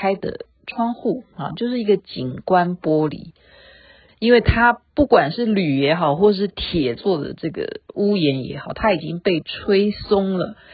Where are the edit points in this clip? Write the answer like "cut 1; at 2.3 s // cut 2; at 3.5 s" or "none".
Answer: cut 1; at 4.1 s